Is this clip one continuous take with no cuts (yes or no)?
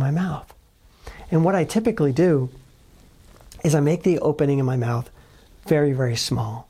yes